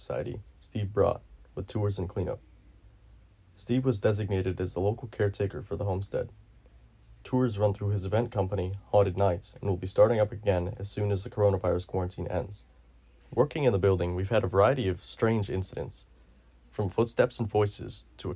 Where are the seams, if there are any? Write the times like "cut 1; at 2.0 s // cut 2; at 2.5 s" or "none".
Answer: cut 1; at 13.2 s